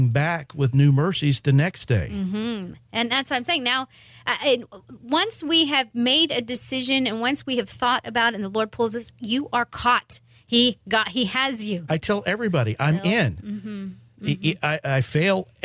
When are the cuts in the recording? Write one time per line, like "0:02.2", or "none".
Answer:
0:11.9